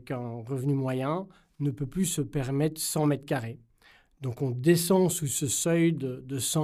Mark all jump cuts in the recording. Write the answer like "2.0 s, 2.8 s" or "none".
none